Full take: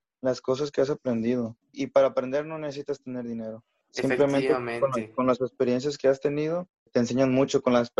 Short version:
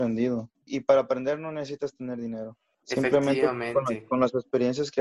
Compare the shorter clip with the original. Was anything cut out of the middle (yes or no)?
no